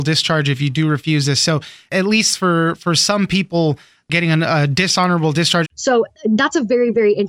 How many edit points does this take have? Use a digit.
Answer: 1